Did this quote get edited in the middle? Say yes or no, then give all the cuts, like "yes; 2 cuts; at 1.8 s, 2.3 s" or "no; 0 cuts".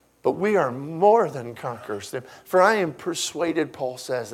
no; 0 cuts